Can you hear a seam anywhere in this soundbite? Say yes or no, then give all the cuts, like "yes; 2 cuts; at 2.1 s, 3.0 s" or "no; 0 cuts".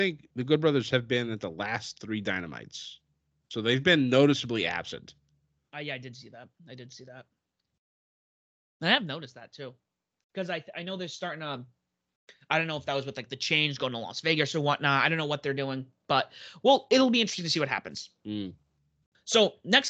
no; 0 cuts